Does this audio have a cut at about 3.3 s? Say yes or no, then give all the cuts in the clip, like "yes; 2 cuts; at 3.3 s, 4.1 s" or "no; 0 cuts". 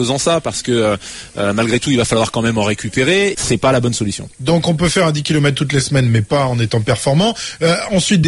yes; 1 cut; at 3.3 s